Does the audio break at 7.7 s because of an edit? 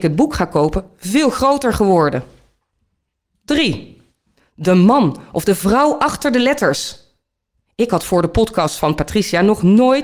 yes; 2 cuts; at 4.4 s, 7.7 s

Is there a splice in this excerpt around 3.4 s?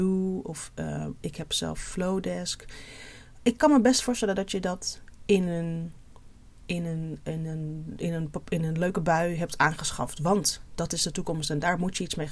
yes; 1 cut; at 3.4 s

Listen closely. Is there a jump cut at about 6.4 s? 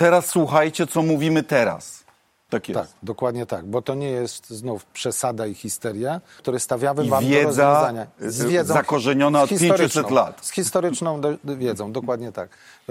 yes; 2 cuts; at 2.5 s, 6.4 s

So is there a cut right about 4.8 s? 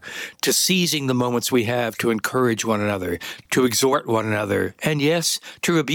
no; 1 cut; at 3.5 s

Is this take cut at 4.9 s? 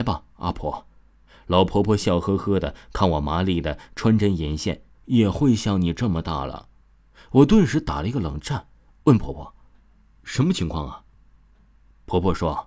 yes; 1 cut; at 4.9 s

